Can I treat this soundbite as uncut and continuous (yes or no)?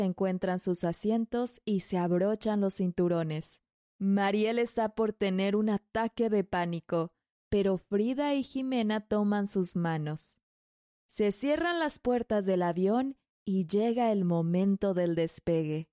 yes